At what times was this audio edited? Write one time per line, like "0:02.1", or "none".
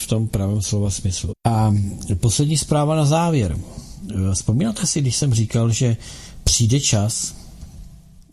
0:01.3